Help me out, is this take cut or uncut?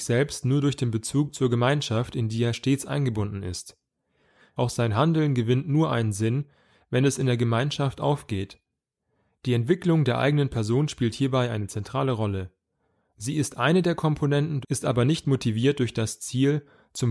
cut